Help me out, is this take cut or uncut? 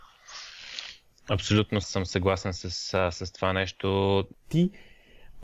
cut